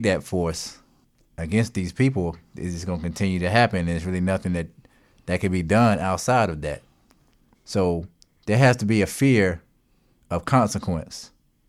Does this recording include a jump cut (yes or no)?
yes